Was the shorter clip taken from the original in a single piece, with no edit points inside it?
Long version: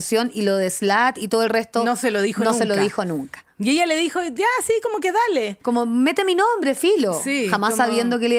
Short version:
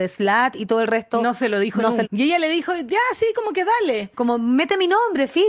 no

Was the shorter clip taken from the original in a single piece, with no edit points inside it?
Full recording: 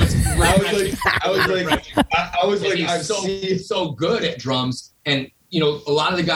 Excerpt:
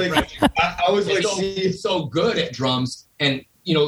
no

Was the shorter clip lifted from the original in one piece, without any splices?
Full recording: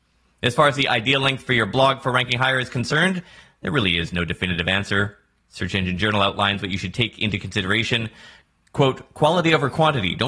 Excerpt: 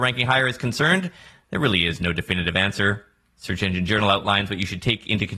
yes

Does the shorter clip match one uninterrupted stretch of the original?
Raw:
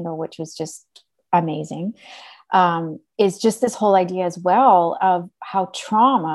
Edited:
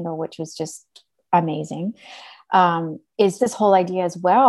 no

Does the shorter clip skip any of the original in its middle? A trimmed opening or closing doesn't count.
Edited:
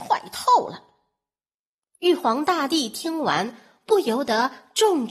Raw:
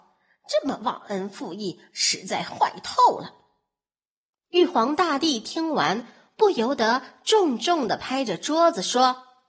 no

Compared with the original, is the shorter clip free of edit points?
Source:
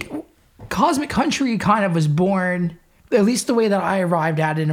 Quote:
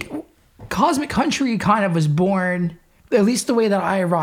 yes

